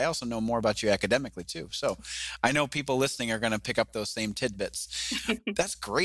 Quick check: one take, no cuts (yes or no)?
yes